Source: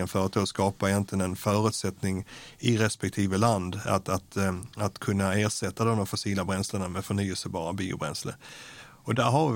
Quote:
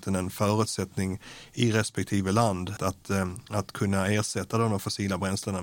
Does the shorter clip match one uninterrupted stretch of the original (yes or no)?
no